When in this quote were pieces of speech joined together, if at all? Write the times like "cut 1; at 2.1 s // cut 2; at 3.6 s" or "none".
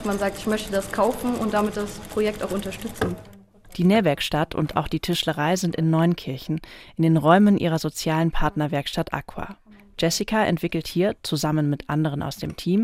none